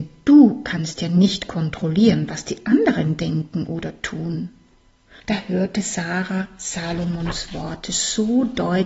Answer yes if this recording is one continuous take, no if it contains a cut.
no